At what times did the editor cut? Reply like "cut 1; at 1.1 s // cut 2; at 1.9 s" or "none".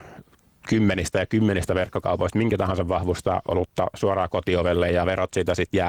none